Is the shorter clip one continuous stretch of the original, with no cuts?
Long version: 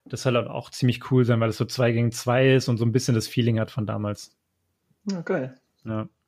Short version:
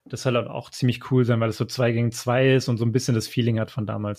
yes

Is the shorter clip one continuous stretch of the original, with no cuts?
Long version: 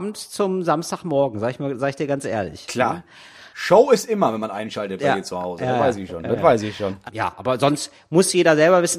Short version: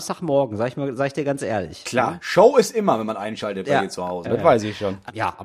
no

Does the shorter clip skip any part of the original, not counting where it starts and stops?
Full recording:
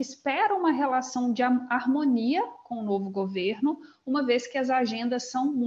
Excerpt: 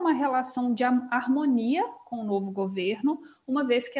no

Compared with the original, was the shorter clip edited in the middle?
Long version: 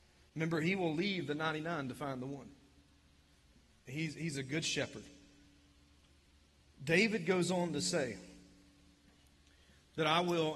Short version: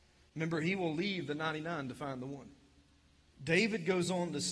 yes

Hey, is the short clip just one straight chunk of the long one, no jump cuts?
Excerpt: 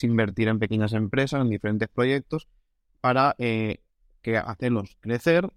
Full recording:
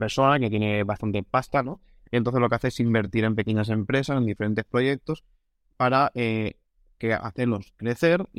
yes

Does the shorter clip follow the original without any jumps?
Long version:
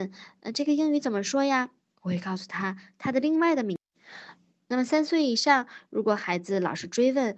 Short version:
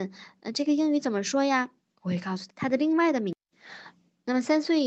no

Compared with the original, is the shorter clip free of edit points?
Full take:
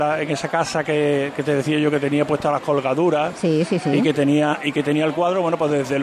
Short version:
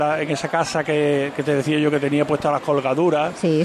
yes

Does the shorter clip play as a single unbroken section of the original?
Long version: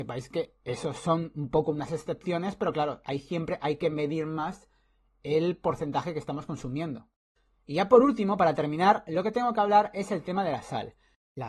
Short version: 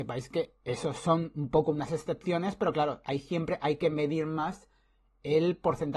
yes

